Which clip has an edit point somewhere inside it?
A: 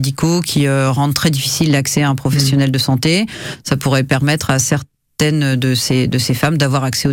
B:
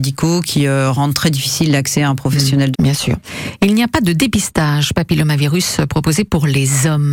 B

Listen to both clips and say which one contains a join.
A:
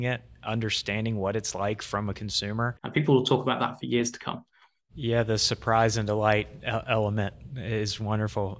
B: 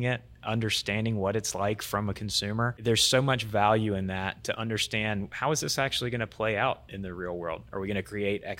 A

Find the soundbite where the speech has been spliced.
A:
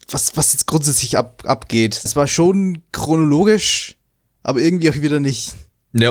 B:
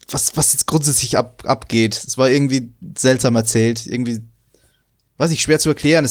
A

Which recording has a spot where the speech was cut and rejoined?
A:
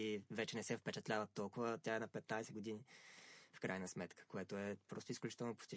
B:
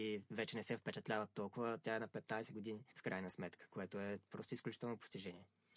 B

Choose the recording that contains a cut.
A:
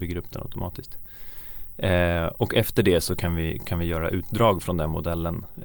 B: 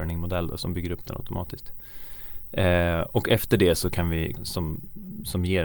B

